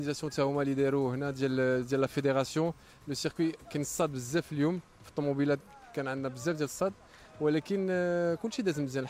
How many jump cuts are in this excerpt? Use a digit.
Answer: 0